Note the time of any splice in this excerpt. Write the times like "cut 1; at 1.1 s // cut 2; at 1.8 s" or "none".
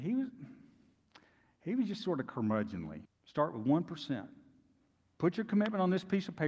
cut 1; at 3.1 s

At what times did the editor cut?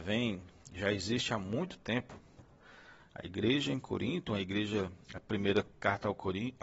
cut 1; at 3.0 s // cut 2; at 5.0 s

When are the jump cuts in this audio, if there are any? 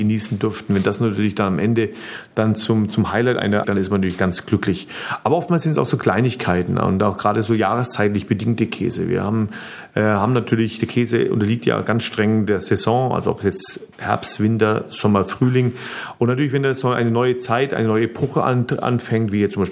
cut 1; at 3.6 s

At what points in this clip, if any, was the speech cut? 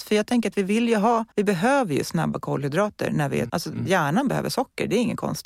cut 1; at 1.3 s // cut 2; at 3.5 s

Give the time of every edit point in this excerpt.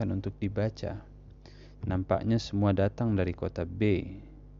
cut 1; at 1.8 s

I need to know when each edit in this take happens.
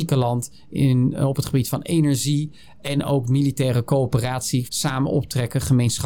cut 1; at 4.7 s

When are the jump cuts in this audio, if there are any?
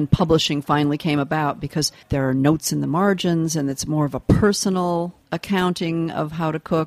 cut 1; at 2.0 s // cut 2; at 5.2 s

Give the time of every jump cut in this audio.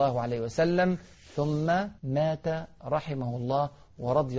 cut 1; at 2.0 s

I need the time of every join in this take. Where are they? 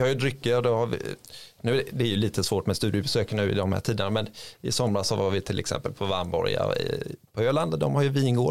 none

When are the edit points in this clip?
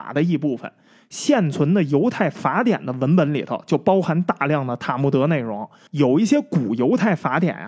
none

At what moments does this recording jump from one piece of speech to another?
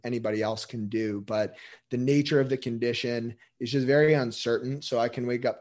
none

